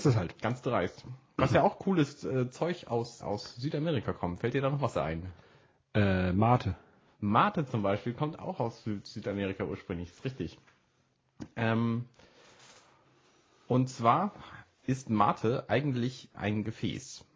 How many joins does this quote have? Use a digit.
1